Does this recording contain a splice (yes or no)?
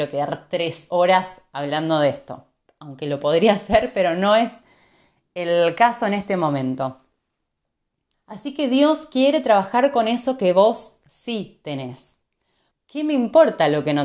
yes